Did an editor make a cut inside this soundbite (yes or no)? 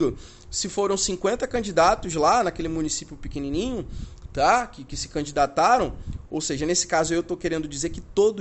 no